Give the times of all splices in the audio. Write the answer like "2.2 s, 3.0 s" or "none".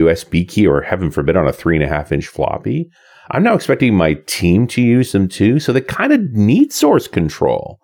none